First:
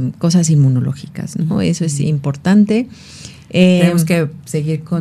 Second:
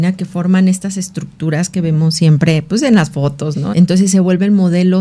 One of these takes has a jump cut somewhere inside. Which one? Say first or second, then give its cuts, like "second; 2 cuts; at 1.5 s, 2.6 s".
second; 1 cut; at 3.7 s